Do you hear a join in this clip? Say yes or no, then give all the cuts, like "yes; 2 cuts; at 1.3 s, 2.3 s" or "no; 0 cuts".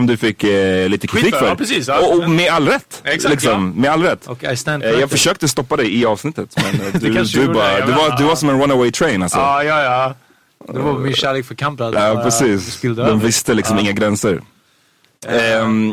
no; 0 cuts